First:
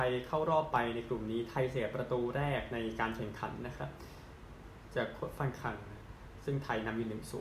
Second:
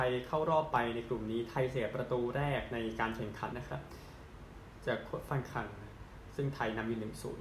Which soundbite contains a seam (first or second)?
second